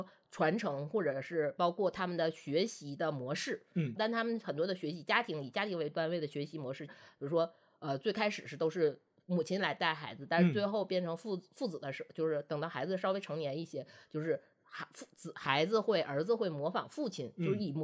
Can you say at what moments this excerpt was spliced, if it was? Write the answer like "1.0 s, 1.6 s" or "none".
4.0 s, 6.9 s

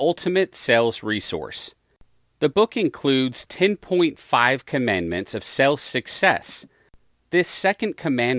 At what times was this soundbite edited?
7.1 s

